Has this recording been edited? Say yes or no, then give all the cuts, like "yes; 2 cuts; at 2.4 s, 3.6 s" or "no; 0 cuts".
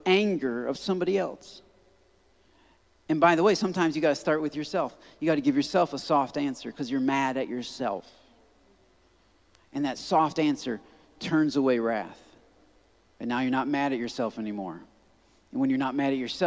no; 0 cuts